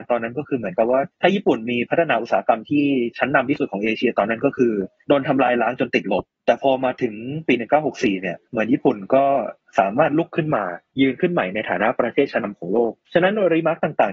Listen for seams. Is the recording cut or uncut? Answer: cut